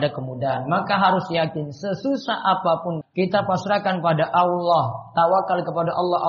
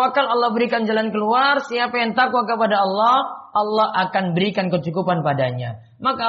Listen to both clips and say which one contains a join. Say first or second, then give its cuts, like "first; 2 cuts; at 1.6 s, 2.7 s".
first; 1 cut; at 3.0 s